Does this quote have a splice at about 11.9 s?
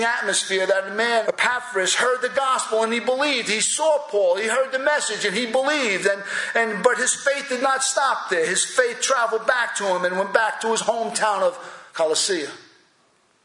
yes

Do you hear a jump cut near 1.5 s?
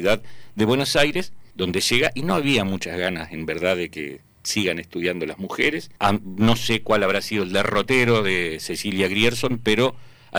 yes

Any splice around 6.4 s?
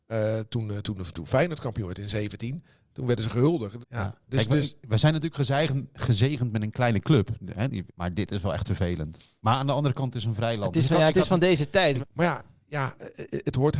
no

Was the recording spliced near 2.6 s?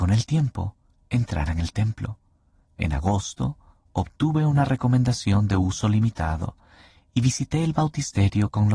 yes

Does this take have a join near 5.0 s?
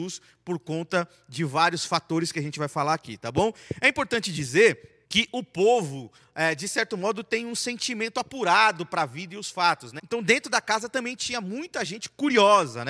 yes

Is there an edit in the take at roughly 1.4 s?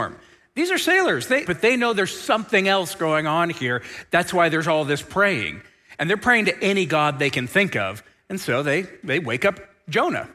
yes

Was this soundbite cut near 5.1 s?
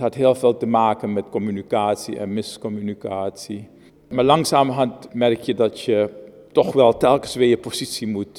yes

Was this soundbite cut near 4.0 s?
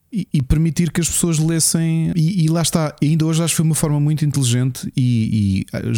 no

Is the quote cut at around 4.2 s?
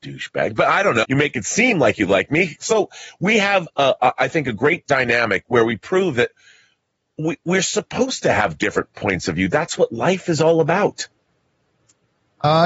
no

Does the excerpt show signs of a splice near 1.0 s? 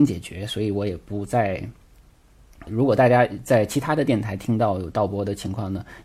no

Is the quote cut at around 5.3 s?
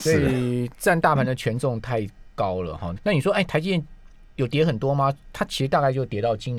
no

